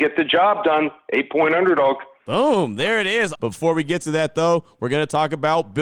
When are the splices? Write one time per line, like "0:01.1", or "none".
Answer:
0:03.3